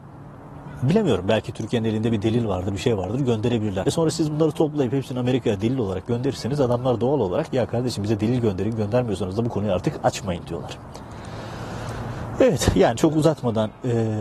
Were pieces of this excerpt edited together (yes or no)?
yes